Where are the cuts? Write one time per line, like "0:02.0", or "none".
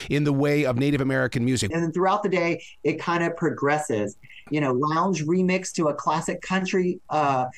0:01.7
0:04.5